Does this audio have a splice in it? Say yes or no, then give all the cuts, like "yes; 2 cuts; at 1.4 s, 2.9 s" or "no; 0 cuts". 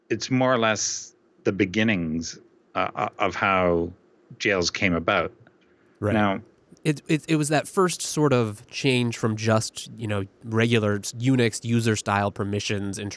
no; 0 cuts